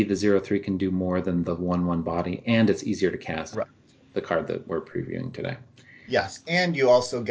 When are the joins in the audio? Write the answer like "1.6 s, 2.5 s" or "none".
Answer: 3.5 s